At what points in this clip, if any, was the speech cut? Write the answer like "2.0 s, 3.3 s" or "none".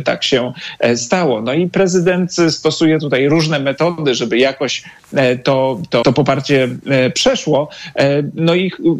6.0 s